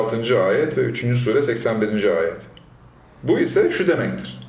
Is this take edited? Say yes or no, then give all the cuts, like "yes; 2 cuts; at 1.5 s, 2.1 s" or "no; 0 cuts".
no; 0 cuts